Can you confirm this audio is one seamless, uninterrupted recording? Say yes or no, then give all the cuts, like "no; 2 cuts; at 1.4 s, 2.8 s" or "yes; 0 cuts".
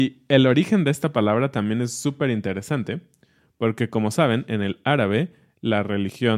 yes; 0 cuts